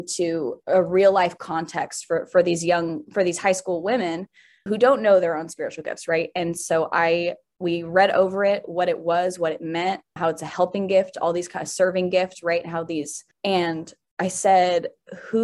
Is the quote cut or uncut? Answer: cut